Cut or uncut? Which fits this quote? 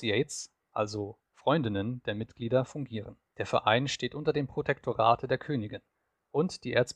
cut